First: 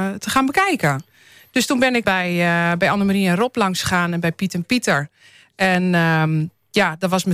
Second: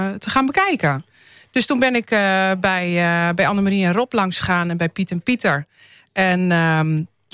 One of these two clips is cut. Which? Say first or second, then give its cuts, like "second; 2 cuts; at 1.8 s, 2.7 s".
first; 1 cut; at 2.0 s